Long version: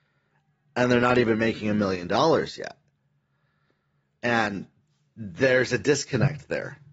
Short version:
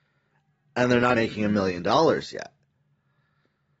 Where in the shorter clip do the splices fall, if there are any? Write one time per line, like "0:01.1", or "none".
0:01.1